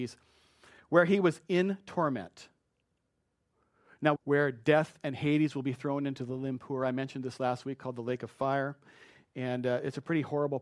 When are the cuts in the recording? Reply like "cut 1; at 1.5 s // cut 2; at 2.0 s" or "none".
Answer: cut 1; at 4.2 s